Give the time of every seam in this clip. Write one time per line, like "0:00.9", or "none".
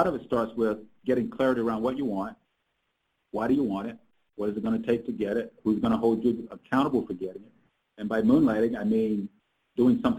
0:04.3
0:07.8